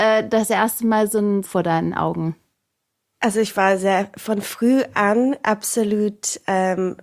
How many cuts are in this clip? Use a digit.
1